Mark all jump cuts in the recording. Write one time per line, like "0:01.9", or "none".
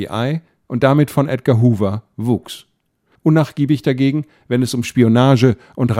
0:03.2